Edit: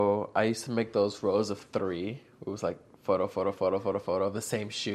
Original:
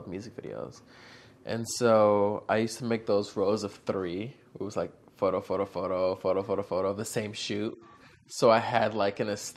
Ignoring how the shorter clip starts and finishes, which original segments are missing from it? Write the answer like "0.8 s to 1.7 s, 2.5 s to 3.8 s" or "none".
5.7 s to 6.2 s